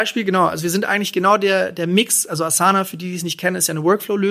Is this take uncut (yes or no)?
yes